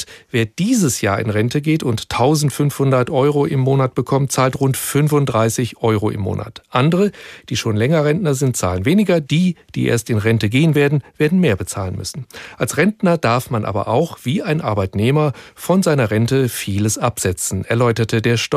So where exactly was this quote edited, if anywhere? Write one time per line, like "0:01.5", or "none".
none